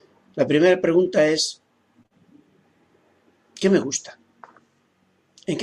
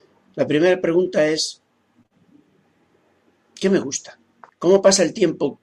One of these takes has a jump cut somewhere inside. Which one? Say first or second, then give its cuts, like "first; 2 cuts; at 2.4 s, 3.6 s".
second; 1 cut; at 4.5 s